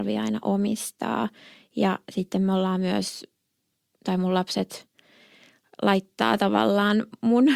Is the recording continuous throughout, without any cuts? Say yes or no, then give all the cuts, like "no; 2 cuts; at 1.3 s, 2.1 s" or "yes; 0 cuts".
yes; 0 cuts